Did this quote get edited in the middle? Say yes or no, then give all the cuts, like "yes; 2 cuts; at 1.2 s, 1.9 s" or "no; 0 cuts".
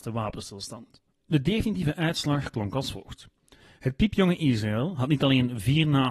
no; 0 cuts